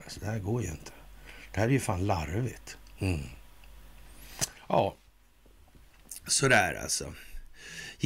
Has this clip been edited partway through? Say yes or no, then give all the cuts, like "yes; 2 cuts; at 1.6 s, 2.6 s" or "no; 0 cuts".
no; 0 cuts